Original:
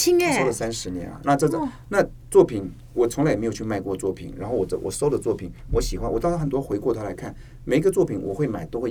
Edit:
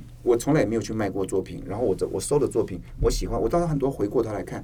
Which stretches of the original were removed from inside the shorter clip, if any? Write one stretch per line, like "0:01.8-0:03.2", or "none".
none